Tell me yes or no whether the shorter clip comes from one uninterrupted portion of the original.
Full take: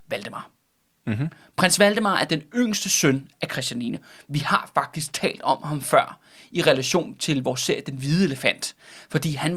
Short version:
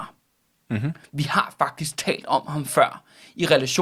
no